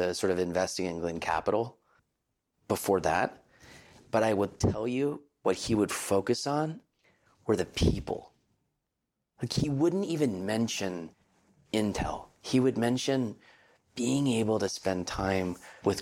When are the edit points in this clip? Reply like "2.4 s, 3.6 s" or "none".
none